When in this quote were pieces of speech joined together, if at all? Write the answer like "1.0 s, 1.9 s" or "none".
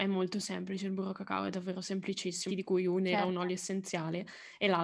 2.5 s